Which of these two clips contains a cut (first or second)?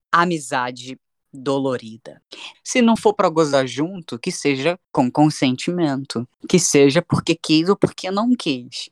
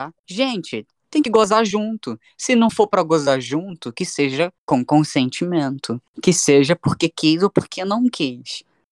first